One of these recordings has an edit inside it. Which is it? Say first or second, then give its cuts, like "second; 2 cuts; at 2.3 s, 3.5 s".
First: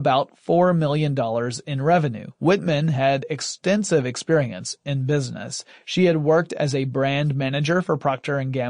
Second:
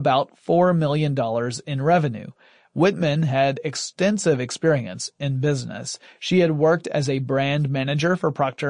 first; 1 cut; at 2.4 s